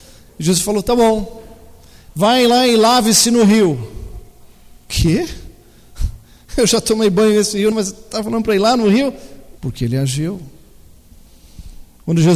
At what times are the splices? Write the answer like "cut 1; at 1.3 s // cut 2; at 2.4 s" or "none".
cut 1; at 7.7 s // cut 2; at 9.6 s